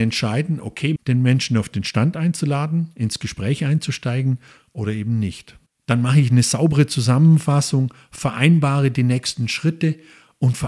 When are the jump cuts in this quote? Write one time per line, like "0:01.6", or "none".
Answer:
0:01.0
0:05.7

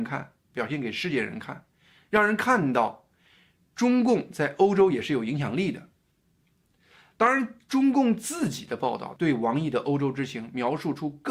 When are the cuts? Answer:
none

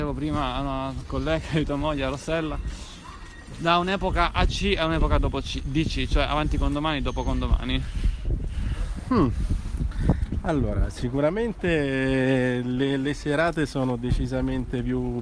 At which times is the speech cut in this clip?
none

